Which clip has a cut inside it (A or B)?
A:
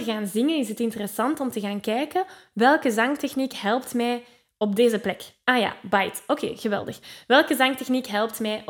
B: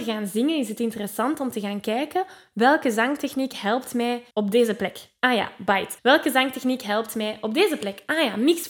B